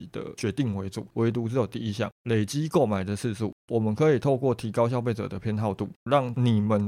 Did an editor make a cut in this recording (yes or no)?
yes